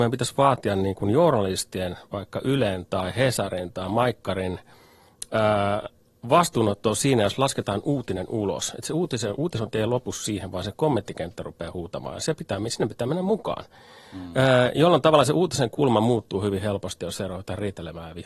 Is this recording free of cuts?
yes; 0 cuts

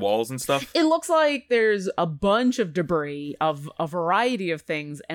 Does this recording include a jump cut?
no; 0 cuts

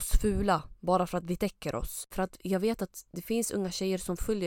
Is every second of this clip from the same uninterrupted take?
no; 1 cut; at 2.1 s

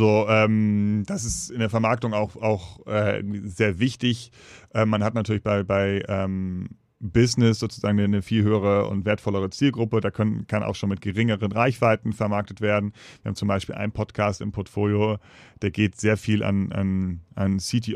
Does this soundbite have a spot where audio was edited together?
no; 0 cuts

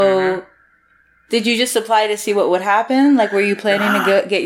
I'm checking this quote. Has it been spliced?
no; 0 cuts

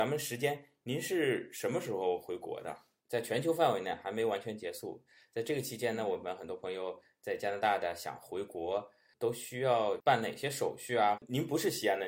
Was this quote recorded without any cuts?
no; 2 cuts; at 3.0 s, 11.2 s

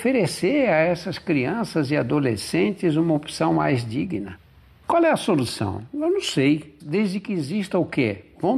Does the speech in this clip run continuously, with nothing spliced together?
no; 1 cut; at 6.8 s

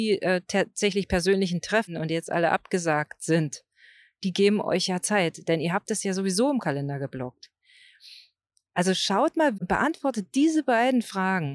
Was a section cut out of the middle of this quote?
yes; 1 cut; at 9.6 s

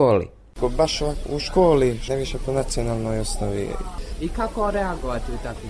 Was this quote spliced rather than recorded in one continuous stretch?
yes; 1 cut; at 2.1 s

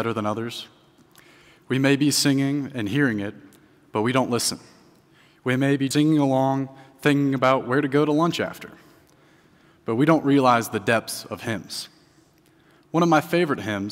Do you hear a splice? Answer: yes; 1 cut; at 5.9 s

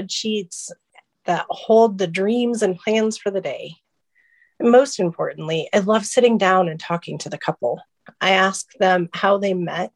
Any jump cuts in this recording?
yes; 1 cut; at 8.1 s

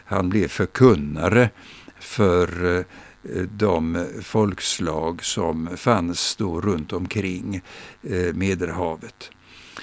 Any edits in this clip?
no; 0 cuts

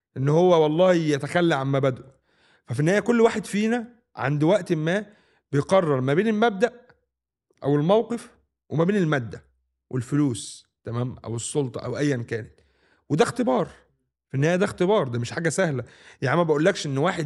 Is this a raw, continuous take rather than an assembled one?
yes; 0 cuts

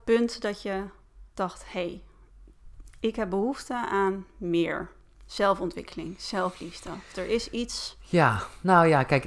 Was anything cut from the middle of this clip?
no; 0 cuts

